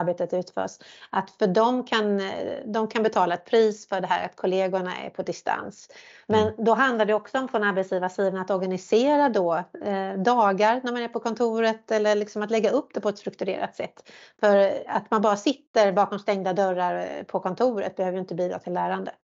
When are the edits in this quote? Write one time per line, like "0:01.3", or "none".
none